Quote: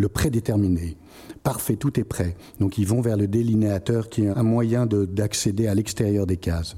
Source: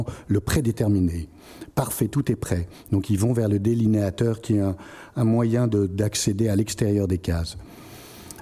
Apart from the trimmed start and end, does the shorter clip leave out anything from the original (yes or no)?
yes